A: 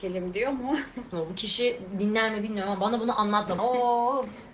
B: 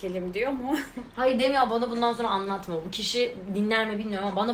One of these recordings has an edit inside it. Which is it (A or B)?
A